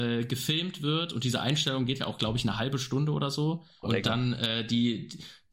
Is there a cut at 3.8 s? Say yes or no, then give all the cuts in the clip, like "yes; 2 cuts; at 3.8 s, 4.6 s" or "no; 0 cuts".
yes; 1 cut; at 3.8 s